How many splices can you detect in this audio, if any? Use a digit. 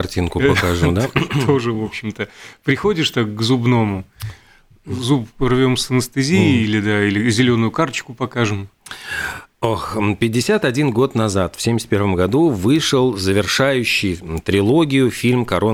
0